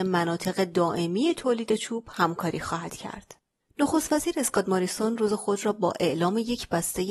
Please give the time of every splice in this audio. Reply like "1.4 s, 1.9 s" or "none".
3.6 s